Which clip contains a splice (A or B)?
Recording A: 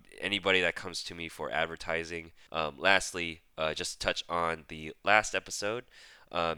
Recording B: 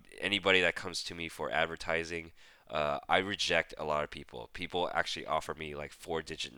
A